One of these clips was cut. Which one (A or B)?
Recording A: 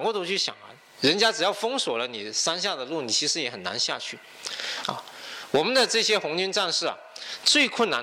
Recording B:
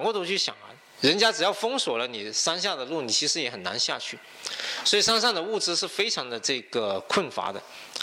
A